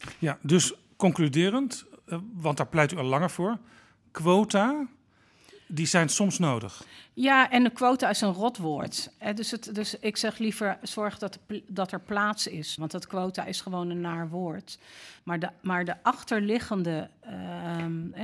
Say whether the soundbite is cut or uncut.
cut